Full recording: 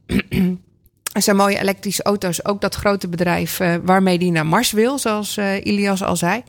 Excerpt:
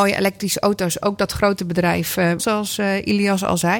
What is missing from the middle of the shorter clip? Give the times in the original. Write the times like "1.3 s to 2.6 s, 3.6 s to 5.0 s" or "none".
3.8 s to 5.0 s